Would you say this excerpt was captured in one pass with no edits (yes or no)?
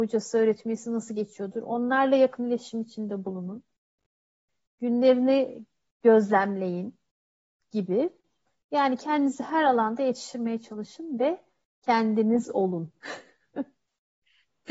yes